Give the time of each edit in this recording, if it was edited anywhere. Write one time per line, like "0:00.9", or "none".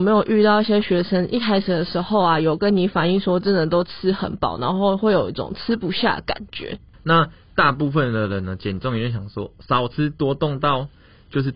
0:06.9